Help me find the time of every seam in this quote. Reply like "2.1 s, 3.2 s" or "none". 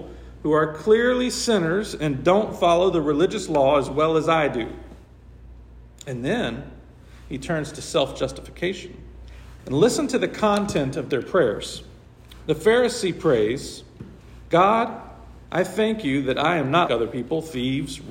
9.6 s, 16.9 s